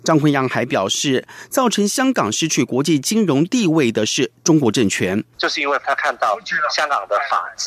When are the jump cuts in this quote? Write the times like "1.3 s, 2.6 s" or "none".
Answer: 5.3 s